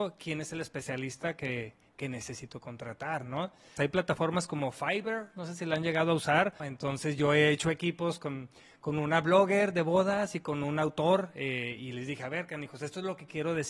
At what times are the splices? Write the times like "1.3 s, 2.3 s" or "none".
3.8 s, 6.6 s